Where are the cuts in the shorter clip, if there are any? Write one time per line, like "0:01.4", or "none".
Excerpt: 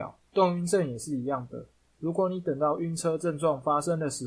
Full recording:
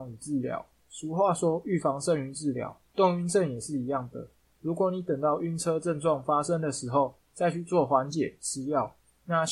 none